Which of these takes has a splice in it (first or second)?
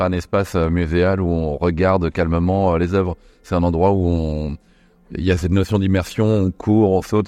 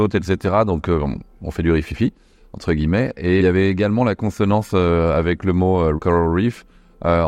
second